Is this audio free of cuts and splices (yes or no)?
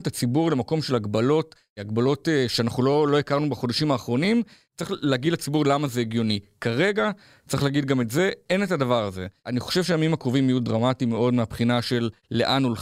yes